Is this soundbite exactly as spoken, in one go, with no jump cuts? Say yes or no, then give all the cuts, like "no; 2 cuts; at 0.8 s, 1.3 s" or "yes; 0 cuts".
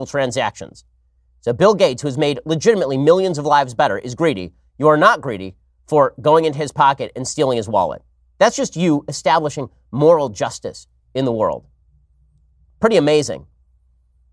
yes; 0 cuts